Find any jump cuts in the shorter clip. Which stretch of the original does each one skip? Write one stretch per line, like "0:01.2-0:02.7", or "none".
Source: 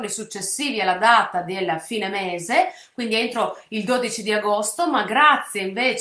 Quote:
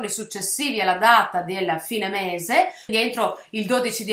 0:02.9-0:03.1